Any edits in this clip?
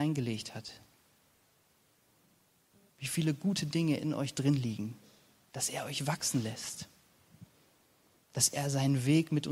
no; 0 cuts

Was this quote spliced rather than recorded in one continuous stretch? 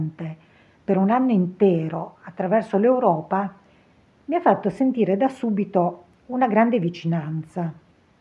no; 0 cuts

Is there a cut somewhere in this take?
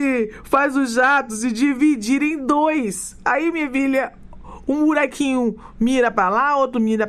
no; 0 cuts

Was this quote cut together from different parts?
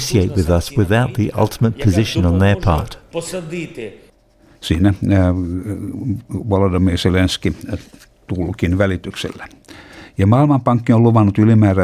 no; 0 cuts

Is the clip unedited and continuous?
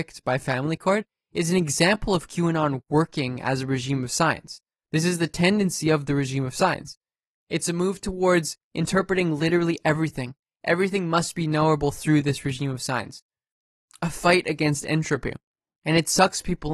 yes; 0 cuts

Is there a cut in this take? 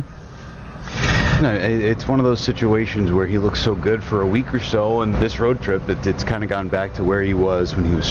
yes; 2 cuts; at 1.4 s, 5.1 s

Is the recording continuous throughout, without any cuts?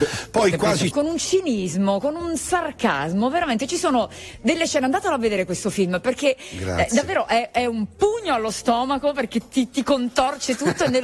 no; 1 cut; at 0.9 s

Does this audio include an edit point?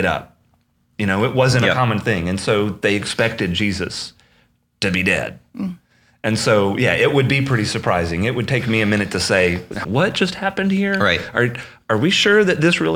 yes; 1 cut; at 9.8 s

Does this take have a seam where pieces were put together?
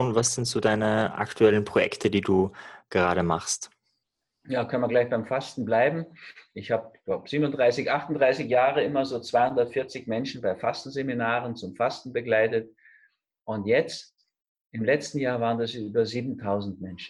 no; 0 cuts

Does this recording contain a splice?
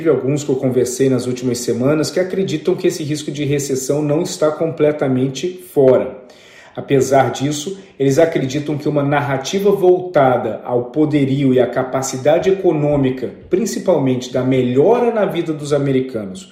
no; 0 cuts

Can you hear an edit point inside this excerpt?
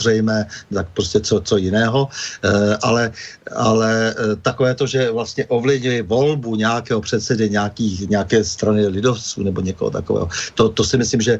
no; 0 cuts

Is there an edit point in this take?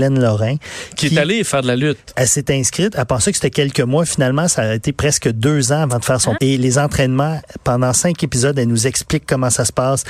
yes; 1 cut; at 6.4 s

